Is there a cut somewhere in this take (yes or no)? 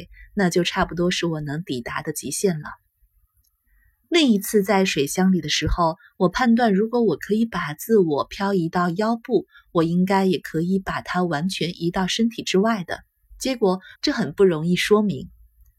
yes